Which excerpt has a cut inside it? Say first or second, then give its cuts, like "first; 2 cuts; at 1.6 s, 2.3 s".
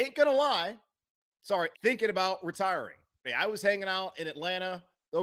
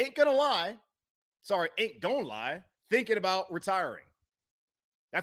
first; 2 cuts; at 1.7 s, 3.2 s